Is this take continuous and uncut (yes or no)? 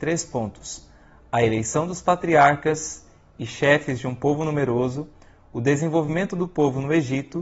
yes